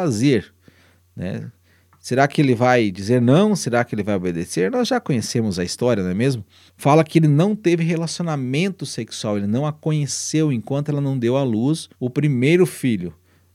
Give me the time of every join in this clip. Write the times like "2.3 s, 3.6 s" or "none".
6.7 s, 11.9 s

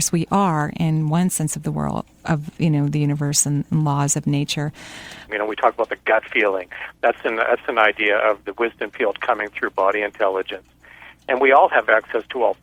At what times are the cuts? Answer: 5.3 s

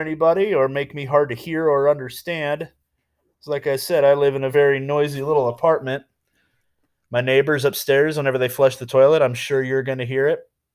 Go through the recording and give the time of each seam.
none

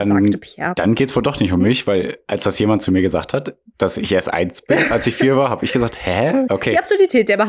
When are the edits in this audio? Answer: 6.5 s

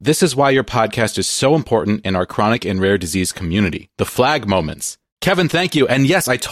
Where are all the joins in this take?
5.1 s

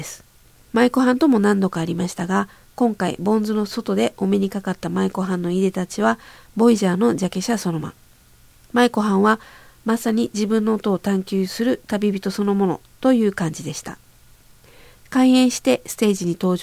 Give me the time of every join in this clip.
7.8 s

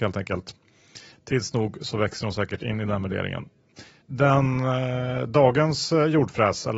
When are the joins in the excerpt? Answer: 4.0 s

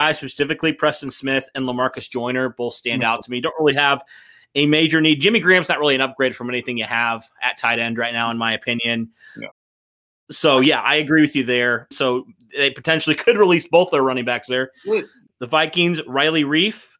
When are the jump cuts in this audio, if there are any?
11.9 s, 15.3 s

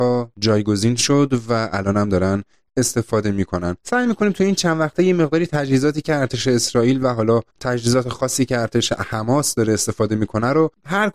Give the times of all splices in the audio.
3.8 s, 7.5 s

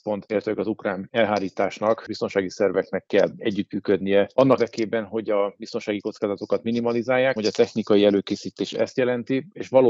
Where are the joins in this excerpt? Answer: 4.6 s, 7.4 s

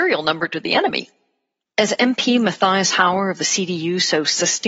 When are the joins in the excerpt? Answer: 1.6 s

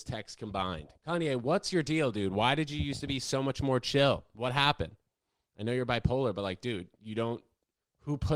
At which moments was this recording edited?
1.0 s

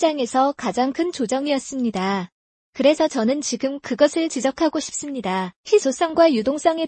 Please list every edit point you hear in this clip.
2.6 s, 5.6 s

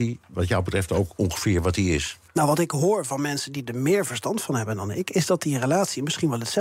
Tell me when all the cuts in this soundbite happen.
2.3 s

